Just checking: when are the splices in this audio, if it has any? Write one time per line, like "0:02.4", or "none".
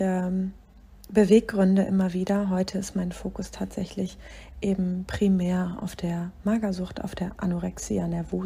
none